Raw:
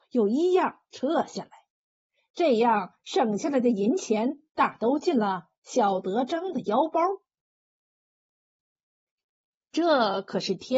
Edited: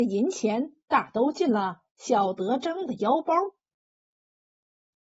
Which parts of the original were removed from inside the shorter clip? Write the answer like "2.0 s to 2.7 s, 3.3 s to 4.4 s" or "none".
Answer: none